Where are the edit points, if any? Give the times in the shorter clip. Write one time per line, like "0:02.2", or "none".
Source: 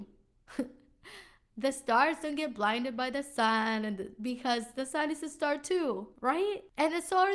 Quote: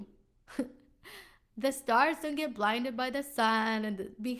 none